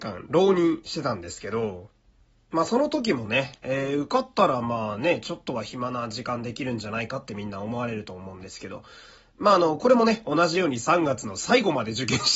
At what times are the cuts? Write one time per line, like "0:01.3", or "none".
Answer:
none